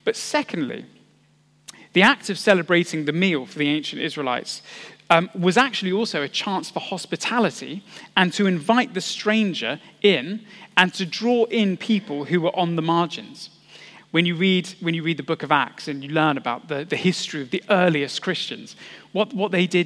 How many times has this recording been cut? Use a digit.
1